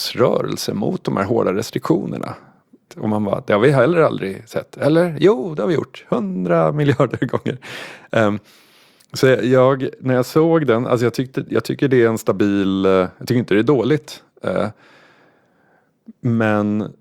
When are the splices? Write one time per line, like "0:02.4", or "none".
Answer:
0:02.9